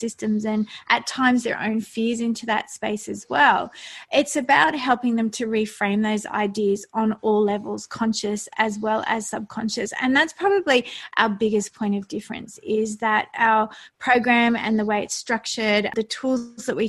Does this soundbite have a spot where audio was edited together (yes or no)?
no